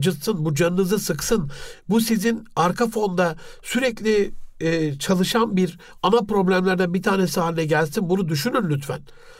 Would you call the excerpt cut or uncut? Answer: uncut